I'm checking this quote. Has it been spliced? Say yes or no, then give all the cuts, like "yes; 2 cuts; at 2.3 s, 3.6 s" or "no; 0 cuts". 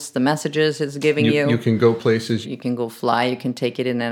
yes; 1 cut; at 2.4 s